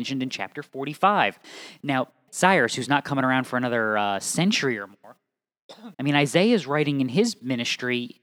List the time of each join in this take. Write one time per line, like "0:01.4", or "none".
0:02.3
0:05.9